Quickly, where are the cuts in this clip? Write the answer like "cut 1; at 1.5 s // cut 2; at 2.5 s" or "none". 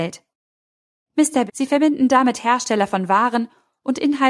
cut 1; at 1.5 s